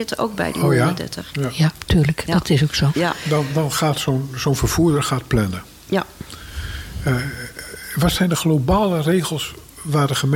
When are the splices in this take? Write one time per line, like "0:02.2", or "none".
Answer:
0:01.3